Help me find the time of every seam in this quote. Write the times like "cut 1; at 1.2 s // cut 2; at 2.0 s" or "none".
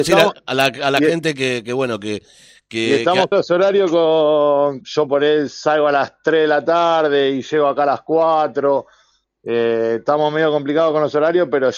cut 1; at 3.3 s // cut 2; at 4.8 s